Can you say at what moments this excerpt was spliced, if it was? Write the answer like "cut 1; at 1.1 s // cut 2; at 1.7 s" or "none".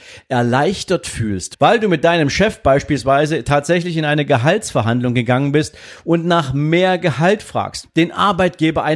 cut 1; at 1.5 s // cut 2; at 7.8 s

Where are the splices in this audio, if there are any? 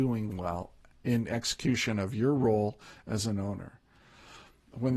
none

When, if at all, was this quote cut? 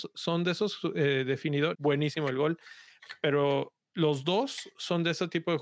cut 1; at 1.7 s

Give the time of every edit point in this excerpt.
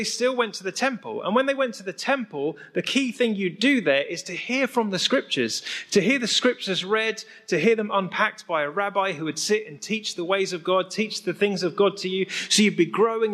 none

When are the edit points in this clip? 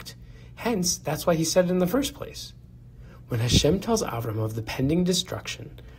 cut 1; at 3.2 s

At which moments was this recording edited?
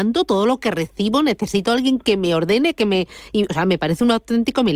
none

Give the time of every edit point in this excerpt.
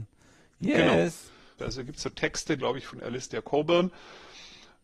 cut 1; at 1.6 s // cut 2; at 2.6 s

